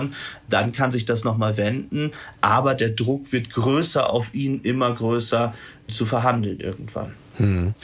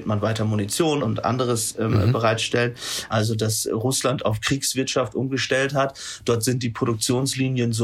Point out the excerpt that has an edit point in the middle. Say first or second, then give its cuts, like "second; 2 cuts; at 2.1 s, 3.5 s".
second; 2 cuts; at 1.0 s, 3.1 s